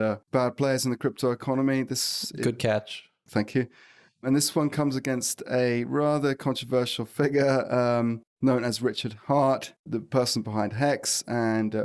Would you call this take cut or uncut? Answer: uncut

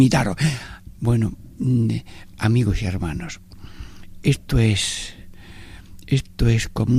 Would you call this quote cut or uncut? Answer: cut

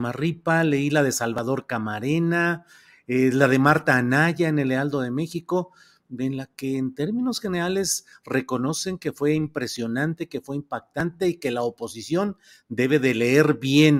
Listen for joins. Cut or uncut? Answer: uncut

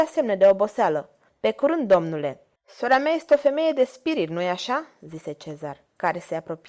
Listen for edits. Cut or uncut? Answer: cut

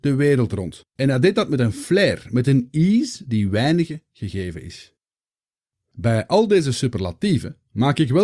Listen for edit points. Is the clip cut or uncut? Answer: cut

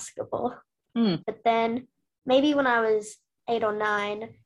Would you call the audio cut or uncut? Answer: cut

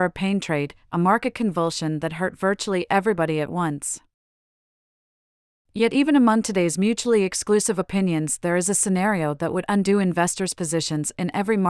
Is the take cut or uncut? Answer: uncut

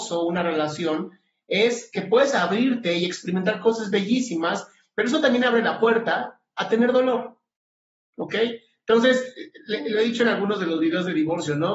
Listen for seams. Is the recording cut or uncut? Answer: uncut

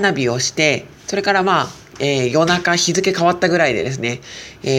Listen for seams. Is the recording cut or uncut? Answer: cut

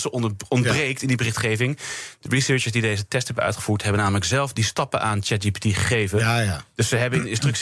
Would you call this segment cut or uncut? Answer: uncut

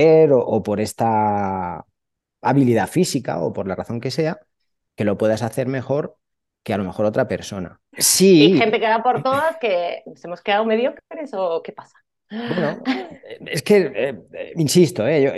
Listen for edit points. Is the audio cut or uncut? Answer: cut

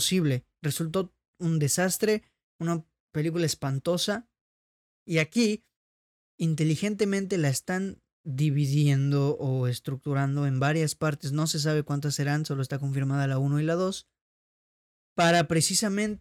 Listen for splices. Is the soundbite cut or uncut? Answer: uncut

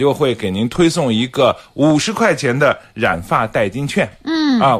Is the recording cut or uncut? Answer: uncut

